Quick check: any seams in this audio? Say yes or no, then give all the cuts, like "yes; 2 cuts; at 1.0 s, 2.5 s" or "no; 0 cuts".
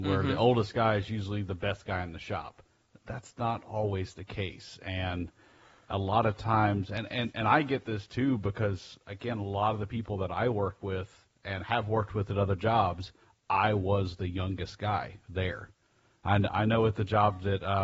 no; 0 cuts